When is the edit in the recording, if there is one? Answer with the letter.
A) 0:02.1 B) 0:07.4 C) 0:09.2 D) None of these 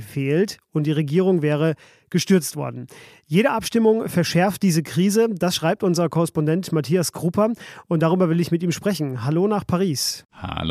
D